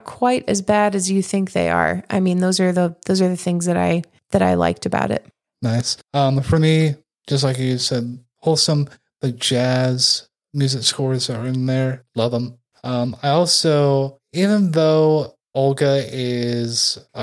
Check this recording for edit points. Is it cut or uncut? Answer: uncut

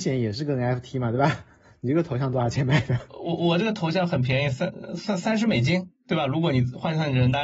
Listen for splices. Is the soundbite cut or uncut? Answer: uncut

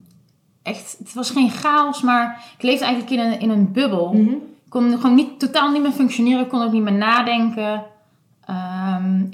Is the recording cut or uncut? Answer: uncut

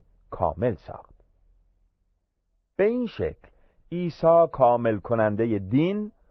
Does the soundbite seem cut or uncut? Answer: uncut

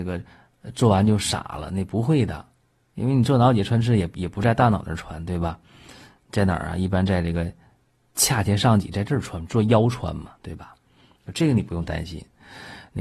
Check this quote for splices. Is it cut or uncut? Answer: uncut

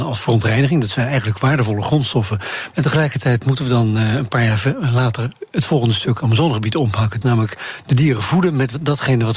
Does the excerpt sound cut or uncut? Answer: cut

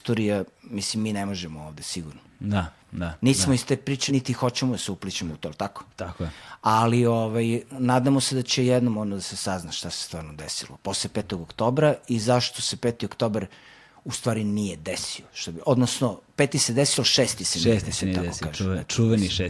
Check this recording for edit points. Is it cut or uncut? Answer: cut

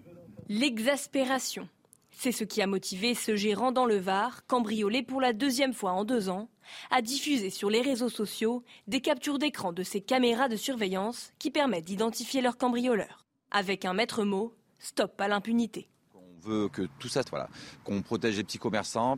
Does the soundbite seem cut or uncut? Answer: cut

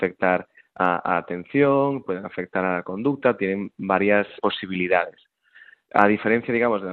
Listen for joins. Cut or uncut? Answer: cut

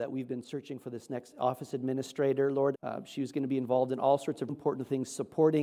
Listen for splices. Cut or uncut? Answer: cut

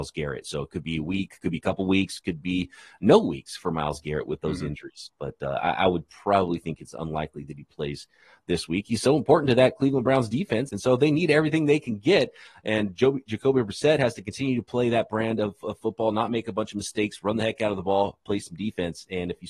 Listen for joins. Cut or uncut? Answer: cut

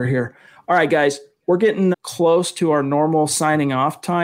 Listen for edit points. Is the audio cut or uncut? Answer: cut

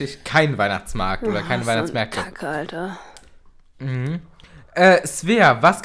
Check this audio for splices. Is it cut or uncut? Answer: uncut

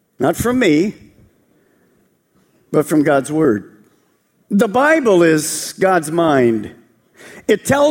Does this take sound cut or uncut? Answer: uncut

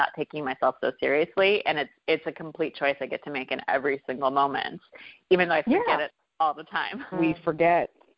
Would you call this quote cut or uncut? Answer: cut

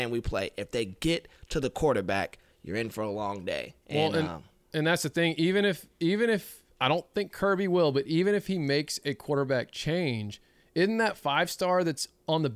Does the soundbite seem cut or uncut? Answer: uncut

